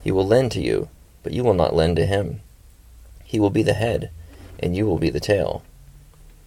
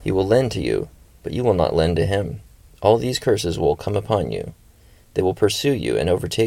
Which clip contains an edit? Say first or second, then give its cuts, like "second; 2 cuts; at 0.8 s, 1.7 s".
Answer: second; 1 cut; at 2.7 s